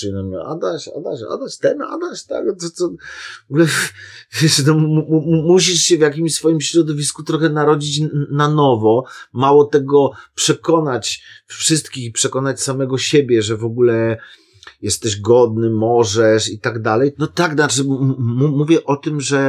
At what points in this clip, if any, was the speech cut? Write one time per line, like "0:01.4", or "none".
0:17.1